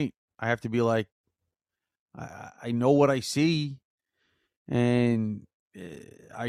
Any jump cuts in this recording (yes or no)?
no